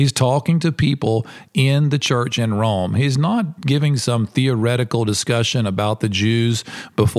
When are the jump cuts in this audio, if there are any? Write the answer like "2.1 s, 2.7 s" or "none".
none

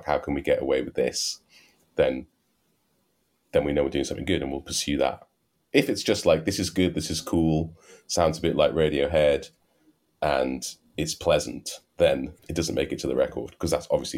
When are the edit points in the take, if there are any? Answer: 12.4 s

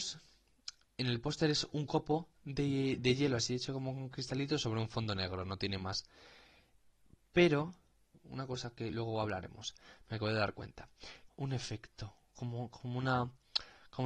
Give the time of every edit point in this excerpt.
8.1 s, 11.3 s

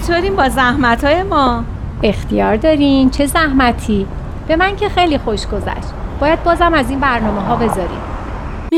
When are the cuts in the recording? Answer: none

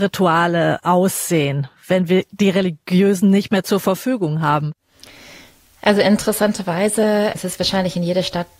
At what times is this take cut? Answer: 7.3 s

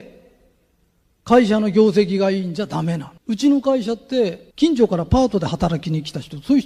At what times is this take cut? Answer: 3.2 s, 4.5 s

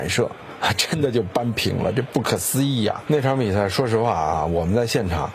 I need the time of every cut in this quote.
3.1 s

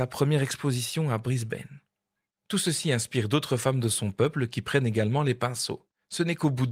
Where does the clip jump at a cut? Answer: none

